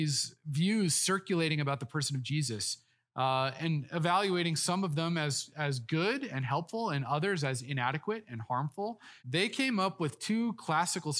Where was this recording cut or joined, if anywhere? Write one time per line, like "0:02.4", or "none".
0:09.2